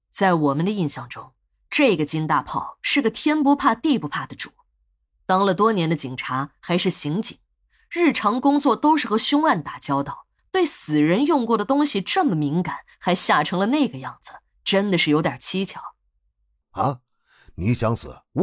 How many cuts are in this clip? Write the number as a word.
two